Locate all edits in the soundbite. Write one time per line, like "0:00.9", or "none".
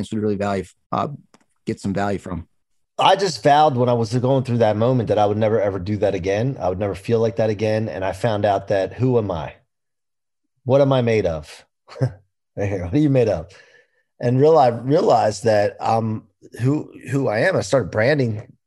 none